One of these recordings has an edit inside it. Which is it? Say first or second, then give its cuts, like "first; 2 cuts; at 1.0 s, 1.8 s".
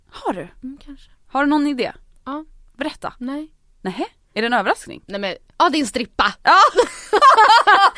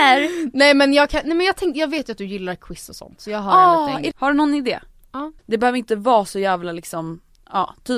second; 2 cuts; at 4.1 s, 5.4 s